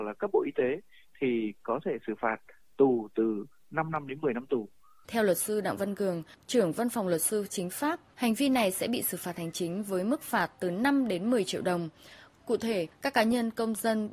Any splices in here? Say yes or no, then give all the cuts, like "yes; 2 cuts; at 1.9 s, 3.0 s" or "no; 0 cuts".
yes; 3 cuts; at 5.0 s, 8.1 s, 12.3 s